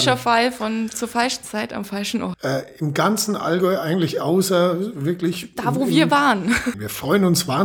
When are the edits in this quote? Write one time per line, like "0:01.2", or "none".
0:02.3
0:06.7